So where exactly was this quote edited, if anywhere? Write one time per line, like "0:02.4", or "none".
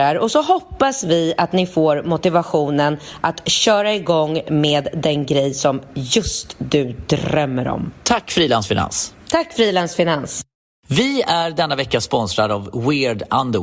none